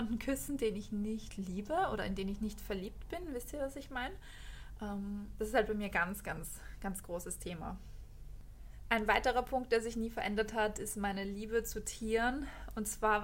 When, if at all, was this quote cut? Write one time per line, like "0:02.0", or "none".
none